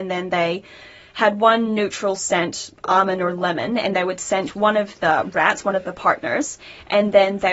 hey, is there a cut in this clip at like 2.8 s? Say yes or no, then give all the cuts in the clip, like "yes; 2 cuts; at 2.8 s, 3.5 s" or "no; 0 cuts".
no; 0 cuts